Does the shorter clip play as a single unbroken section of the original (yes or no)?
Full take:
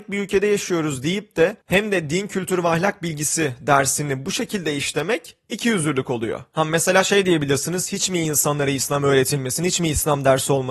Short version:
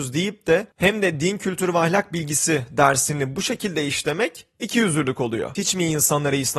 no